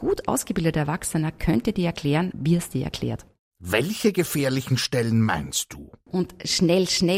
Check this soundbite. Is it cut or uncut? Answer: cut